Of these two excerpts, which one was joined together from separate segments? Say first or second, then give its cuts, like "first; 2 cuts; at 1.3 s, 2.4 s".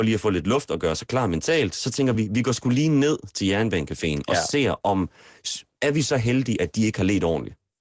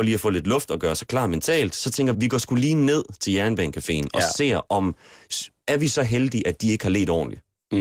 second; 1 cut; at 2.1 s